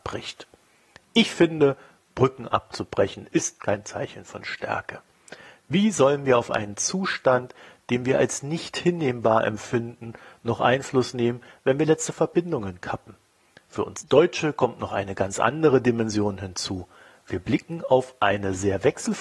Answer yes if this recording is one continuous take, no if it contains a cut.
yes